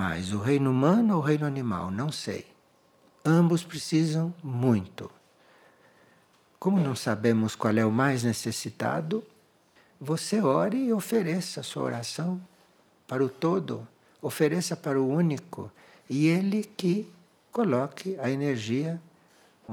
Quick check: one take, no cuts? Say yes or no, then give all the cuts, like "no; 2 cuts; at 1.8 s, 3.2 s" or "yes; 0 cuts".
yes; 0 cuts